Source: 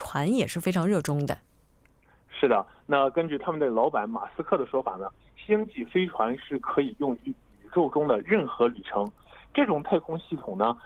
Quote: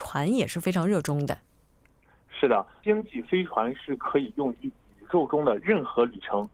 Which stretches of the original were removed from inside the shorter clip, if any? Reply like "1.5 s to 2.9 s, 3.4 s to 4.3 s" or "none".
2.8 s to 5.5 s